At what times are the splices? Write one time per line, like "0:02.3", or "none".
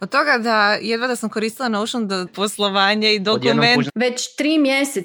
0:02.3
0:03.9